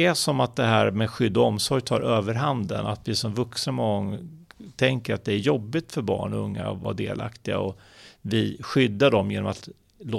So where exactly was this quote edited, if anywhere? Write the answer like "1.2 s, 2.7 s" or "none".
none